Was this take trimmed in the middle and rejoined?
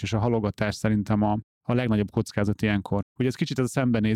yes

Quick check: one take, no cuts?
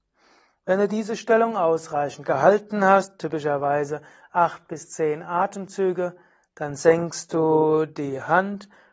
yes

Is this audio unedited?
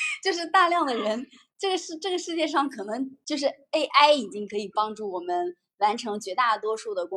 yes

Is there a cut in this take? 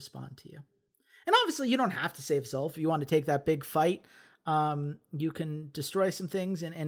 no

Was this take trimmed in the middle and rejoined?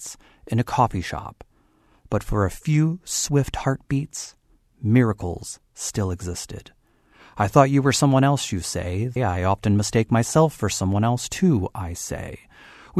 yes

